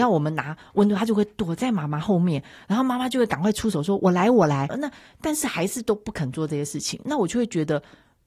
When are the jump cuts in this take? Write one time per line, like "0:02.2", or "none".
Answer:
0:04.7

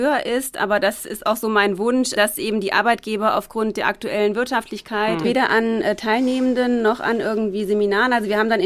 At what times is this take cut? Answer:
0:02.2
0:05.2

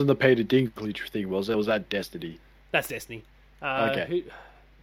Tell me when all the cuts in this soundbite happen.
none

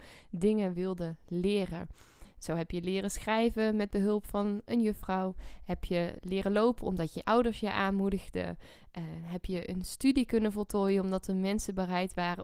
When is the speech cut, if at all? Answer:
none

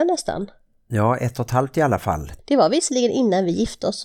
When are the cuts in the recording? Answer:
0:02.4

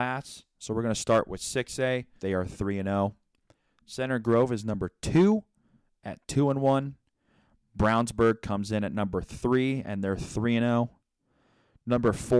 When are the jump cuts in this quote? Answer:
0:02.2

